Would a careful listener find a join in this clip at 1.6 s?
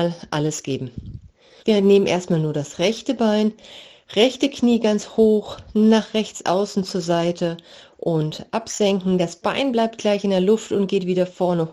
yes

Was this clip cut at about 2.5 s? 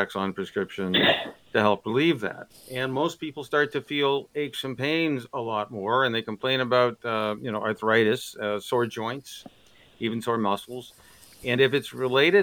yes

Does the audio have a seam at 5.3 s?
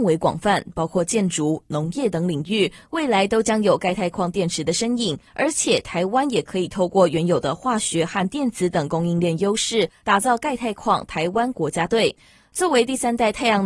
yes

